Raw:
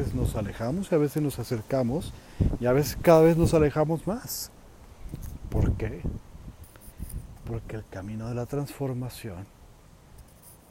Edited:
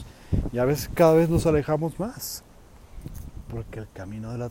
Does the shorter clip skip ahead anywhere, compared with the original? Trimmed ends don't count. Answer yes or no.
yes